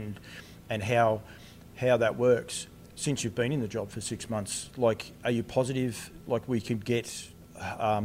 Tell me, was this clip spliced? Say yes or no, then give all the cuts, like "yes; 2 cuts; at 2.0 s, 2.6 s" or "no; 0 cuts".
no; 0 cuts